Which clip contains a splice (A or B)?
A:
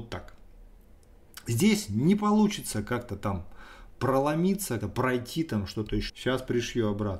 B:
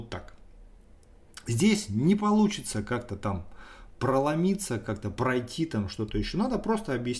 A